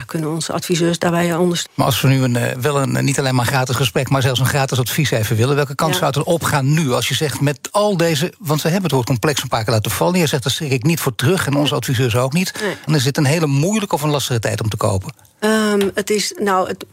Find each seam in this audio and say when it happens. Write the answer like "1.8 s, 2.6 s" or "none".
1.6 s, 12.9 s